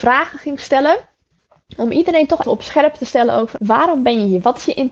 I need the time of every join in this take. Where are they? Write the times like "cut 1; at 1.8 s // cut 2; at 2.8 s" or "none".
cut 1; at 2.4 s // cut 2; at 3.6 s